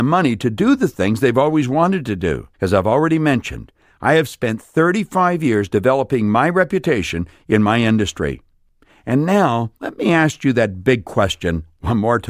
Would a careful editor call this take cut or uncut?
cut